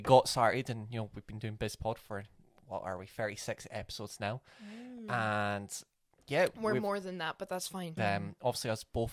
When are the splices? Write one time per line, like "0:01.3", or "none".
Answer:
0:08.0